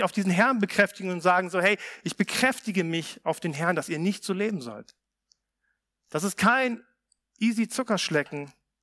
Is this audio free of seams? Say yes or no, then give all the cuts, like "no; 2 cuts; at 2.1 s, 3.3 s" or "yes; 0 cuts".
yes; 0 cuts